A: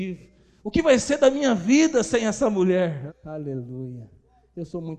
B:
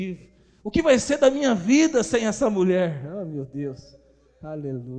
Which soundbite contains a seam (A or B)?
A